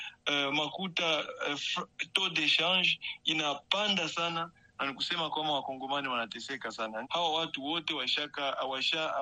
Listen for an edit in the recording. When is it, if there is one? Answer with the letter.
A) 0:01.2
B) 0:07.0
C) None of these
B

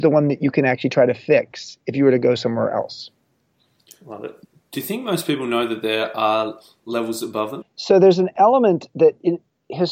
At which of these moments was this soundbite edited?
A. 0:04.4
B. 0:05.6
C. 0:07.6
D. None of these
C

